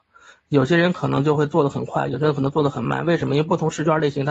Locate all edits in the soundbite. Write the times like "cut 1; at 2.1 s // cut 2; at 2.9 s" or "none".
none